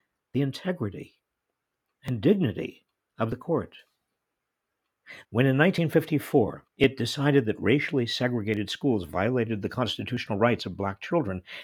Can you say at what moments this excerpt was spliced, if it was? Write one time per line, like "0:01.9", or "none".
0:05.2
0:06.7

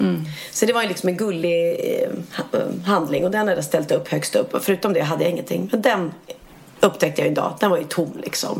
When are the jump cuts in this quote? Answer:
none

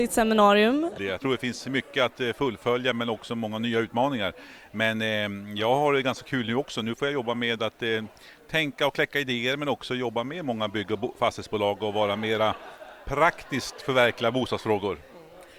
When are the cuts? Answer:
0:01.0

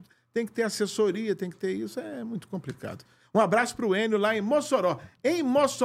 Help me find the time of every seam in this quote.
none

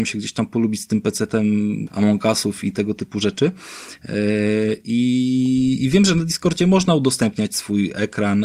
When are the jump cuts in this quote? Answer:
0:01.9

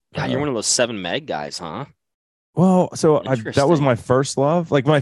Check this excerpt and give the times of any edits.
none

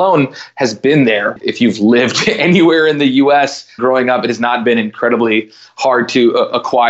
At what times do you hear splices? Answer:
0:01.4
0:03.8

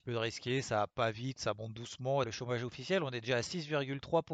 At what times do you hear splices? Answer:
0:02.2

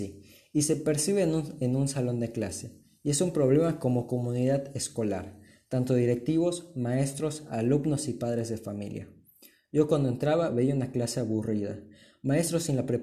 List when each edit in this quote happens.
none

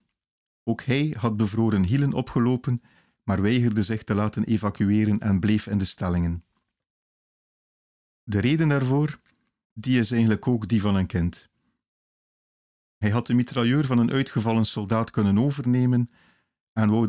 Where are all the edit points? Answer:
0:09.6

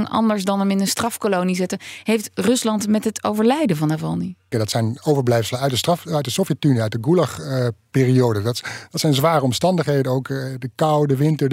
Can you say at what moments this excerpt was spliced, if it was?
0:04.5

